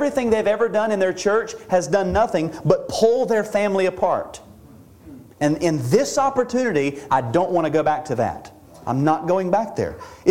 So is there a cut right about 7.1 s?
yes; 1 cut; at 7.1 s

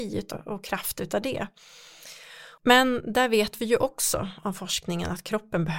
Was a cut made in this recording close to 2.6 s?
yes; 1 cut; at 2.6 s

